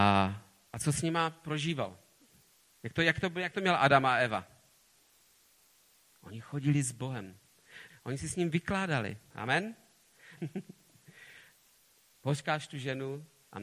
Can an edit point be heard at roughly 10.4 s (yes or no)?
yes